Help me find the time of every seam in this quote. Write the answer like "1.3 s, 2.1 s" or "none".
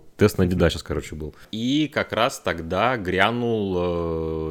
none